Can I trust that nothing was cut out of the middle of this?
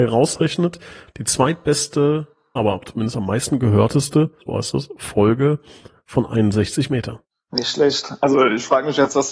no; 2 cuts; at 2.6 s, 4.4 s

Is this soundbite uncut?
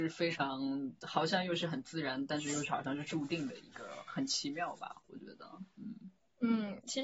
yes; 0 cuts

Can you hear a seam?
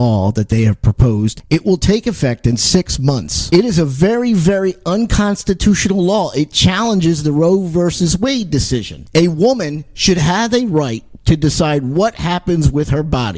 no; 0 cuts

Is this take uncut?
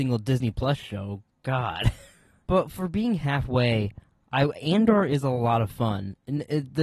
yes; 0 cuts

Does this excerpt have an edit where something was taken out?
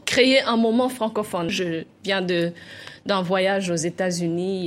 yes; 1 cut; at 1.5 s

